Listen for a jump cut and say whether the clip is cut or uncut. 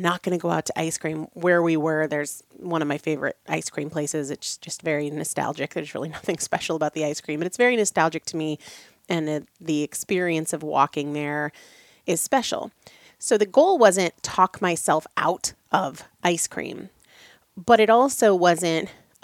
uncut